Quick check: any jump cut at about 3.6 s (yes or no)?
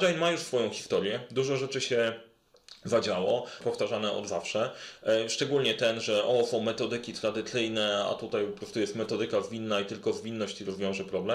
yes